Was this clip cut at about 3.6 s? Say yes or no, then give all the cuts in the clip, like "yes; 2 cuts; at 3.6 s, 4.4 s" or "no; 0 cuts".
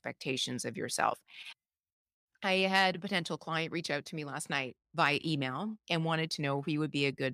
no; 2 cuts; at 2.3 s, 4.8 s